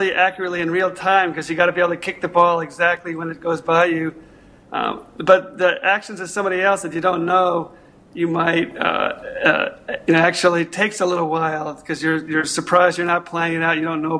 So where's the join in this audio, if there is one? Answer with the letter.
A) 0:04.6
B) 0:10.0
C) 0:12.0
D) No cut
A